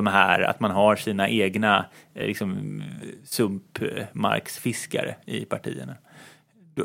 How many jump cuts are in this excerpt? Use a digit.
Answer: 0